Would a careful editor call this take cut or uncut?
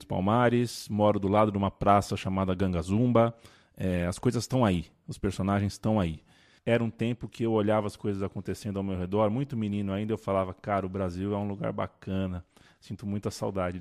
cut